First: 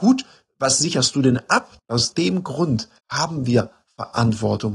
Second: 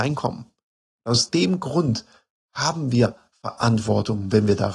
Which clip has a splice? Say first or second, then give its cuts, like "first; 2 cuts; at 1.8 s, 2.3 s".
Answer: first; 2 cuts; at 1.8 s, 3.0 s